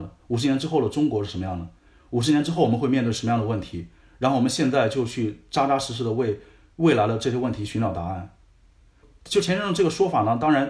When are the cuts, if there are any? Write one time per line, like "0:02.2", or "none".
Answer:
none